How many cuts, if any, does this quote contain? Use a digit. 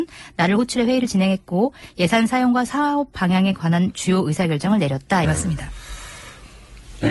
1